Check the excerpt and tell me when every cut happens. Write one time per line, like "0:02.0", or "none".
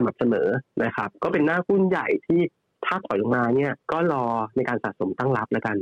0:03.8